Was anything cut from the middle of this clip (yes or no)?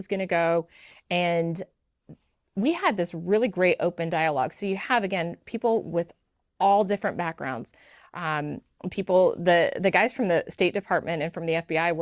no